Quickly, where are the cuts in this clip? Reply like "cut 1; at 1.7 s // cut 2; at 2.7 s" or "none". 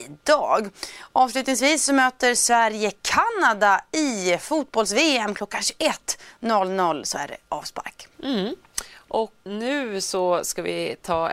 cut 1; at 8.1 s // cut 2; at 9.5 s